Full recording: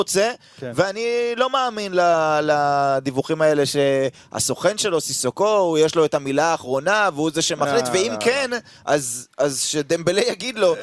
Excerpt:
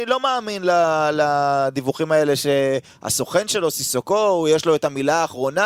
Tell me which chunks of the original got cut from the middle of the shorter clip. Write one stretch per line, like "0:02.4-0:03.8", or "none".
none